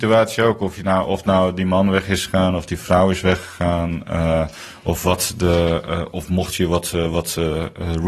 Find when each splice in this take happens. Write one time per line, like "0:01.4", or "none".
none